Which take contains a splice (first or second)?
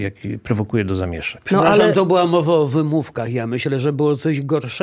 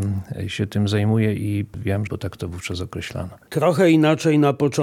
second